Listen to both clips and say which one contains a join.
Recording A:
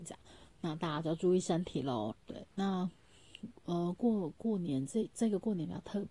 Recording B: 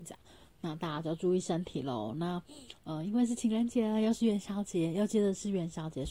A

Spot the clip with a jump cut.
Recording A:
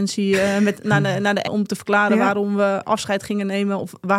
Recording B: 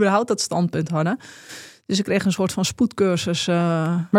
A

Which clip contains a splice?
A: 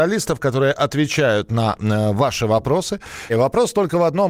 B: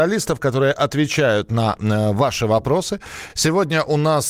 A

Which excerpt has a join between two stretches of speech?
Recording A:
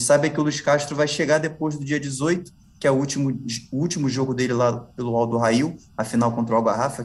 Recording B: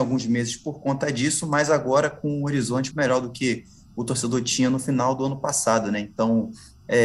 B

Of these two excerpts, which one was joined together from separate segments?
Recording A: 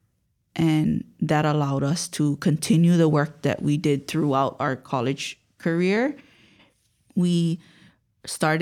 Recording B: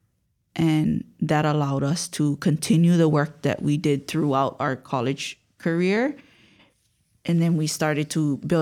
A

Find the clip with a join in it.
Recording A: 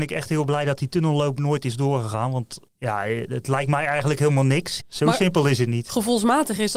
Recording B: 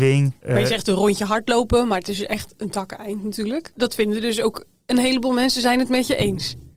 A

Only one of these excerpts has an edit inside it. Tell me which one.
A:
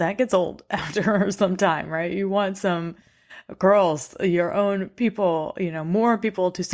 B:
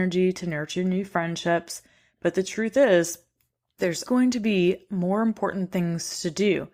B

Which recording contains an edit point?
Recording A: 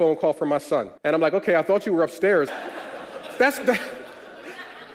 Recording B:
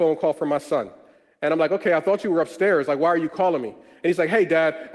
A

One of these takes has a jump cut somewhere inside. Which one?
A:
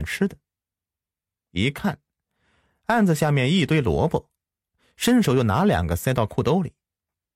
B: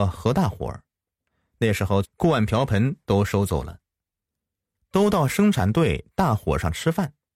B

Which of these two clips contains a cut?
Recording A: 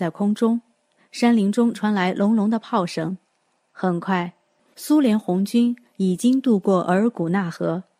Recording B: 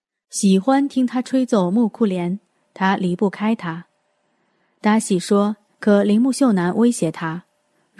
B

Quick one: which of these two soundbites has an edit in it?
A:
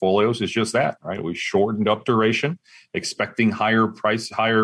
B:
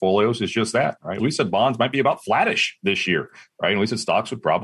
B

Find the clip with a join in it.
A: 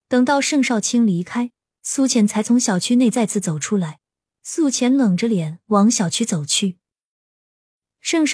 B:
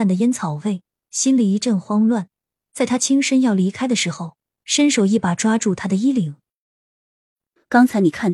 A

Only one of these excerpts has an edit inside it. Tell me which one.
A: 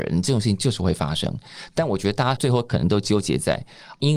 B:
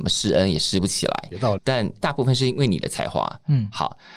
B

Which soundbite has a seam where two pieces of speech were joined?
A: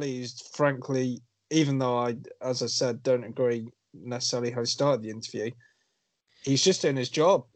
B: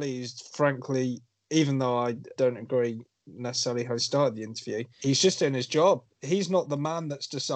B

